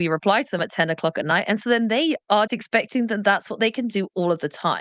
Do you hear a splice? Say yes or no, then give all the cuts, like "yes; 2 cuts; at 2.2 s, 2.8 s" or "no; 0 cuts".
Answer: yes; 1 cut; at 2.5 s